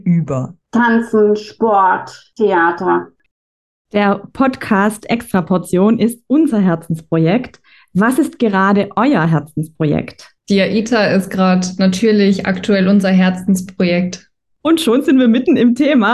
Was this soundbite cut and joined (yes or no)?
no